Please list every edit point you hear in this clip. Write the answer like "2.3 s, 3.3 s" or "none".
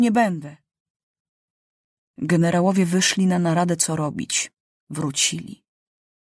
4.8 s